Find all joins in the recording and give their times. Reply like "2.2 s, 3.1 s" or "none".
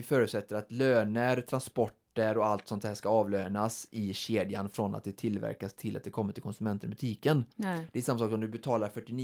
7.5 s